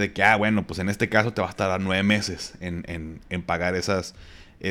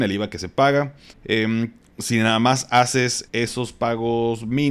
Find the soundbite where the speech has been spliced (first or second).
second